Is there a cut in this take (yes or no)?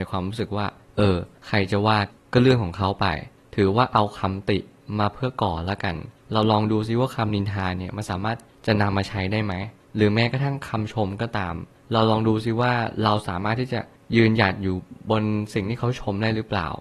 no